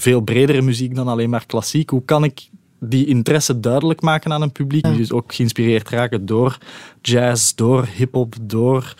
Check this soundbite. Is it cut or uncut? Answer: cut